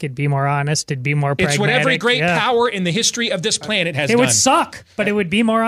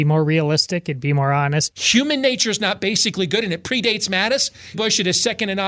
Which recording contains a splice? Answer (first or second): second